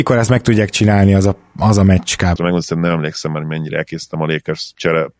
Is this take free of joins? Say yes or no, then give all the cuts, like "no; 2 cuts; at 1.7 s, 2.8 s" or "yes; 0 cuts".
no; 1 cut; at 2.4 s